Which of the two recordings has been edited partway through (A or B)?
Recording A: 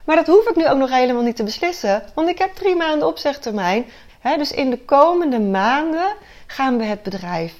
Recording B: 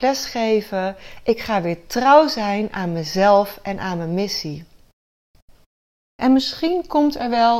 A